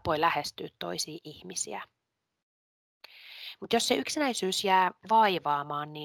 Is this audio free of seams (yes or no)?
yes